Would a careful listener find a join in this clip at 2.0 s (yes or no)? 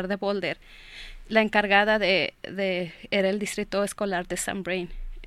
no